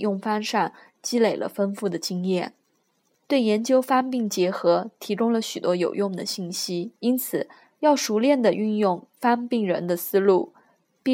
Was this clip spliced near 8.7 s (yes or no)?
no